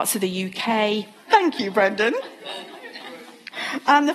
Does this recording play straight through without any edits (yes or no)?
no